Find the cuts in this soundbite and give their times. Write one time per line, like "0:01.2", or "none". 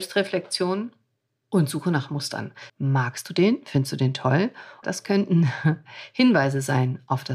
0:02.7
0:04.8

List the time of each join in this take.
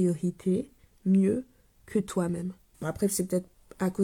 0:02.7

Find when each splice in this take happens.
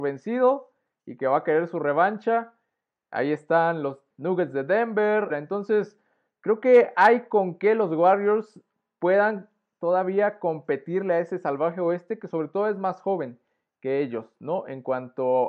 0:05.3

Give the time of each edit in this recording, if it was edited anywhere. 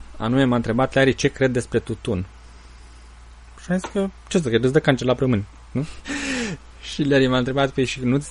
0:06.0

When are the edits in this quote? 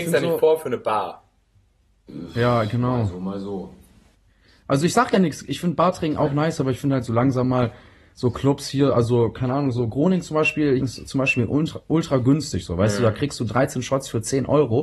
0:10.8

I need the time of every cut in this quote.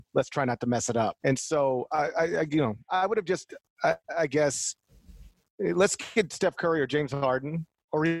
0:01.2

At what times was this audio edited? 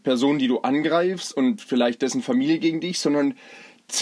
none

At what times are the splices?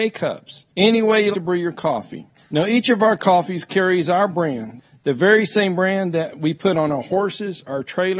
0:01.3

